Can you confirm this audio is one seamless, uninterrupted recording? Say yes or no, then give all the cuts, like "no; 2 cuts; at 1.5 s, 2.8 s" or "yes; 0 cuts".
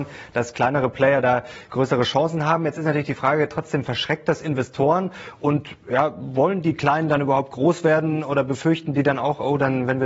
yes; 0 cuts